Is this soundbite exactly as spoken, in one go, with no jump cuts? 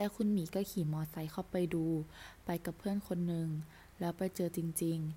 yes; 0 cuts

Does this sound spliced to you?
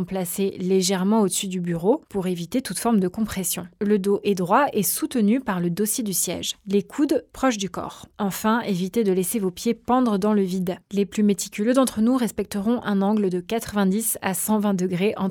yes; 1 cut; at 10.8 s

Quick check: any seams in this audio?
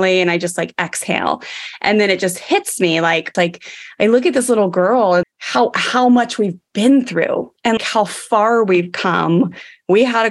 yes; 3 cuts; at 3.3 s, 5.2 s, 7.8 s

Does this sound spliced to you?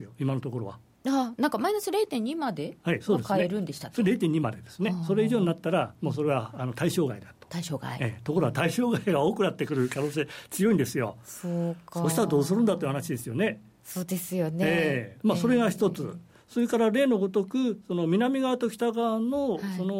no; 0 cuts

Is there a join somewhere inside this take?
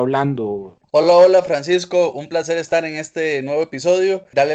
no; 0 cuts

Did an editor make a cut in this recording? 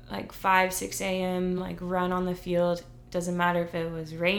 no; 0 cuts

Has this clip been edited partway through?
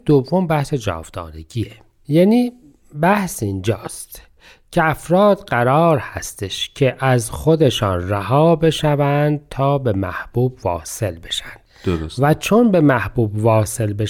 no; 0 cuts

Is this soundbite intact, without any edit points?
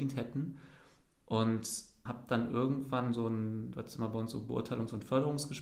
no; 1 cut; at 2.1 s

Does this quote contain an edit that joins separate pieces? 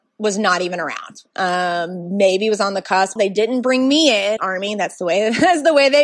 yes; 2 cuts; at 3.2 s, 4.4 s

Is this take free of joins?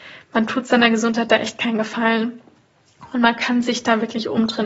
yes; 0 cuts

